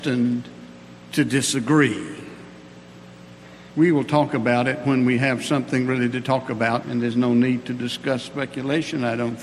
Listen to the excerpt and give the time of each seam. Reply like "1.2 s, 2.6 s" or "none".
3.7 s, 6.8 s